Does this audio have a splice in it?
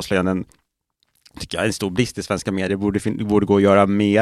no; 0 cuts

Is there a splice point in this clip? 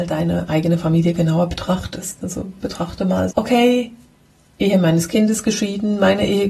yes; 1 cut; at 3.3 s

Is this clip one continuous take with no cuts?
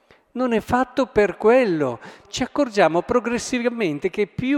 no; 1 cut; at 2.2 s

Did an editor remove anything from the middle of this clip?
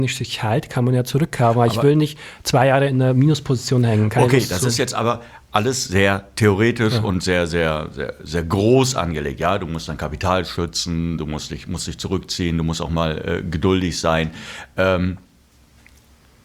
no; 0 cuts

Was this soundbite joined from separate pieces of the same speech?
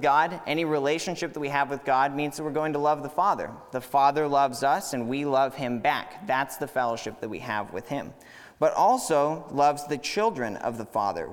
no; 0 cuts

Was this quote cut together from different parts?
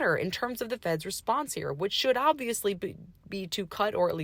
no; 0 cuts

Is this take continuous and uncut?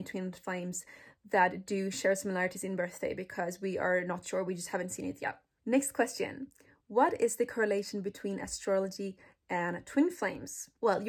yes; 0 cuts

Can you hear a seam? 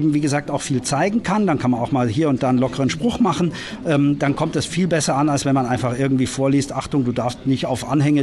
no; 0 cuts

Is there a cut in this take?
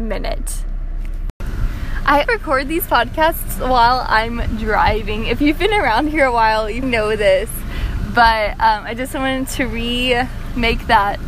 yes; 2 cuts; at 2.2 s, 6.8 s

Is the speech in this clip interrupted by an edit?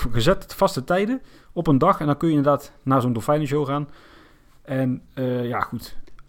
no; 0 cuts

